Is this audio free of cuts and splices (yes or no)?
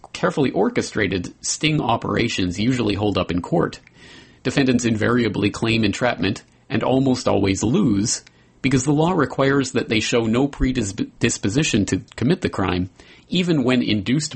yes